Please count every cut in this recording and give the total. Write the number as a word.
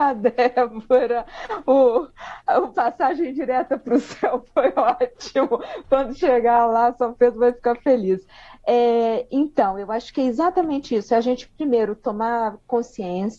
zero